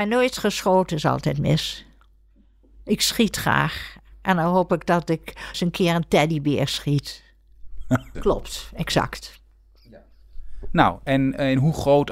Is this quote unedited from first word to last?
no; 2 cuts; at 5.5 s, 8.1 s

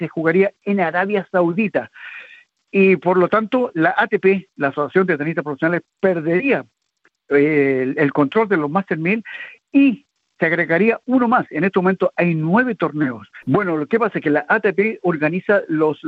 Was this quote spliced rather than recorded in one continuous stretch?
yes; 2 cuts; at 2.6 s, 13.4 s

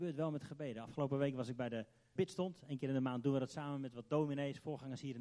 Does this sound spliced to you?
yes; 1 cut; at 2.2 s

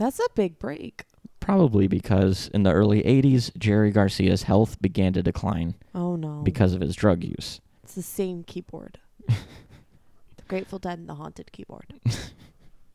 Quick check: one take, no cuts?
no; 1 cut; at 7.8 s

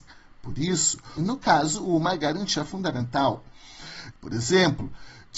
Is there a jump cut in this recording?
yes; 2 cuts; at 1.2 s, 4.1 s

